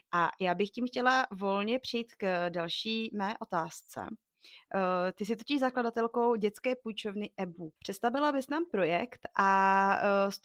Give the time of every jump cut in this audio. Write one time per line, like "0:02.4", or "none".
0:07.8